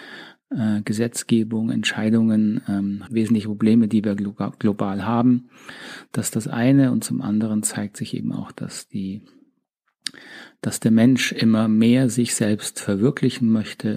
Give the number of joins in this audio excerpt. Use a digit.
1